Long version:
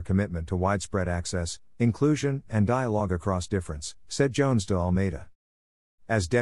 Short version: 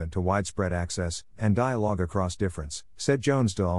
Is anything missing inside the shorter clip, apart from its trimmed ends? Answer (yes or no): yes